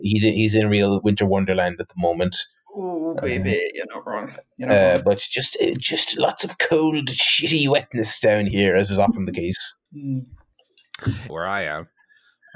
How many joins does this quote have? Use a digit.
2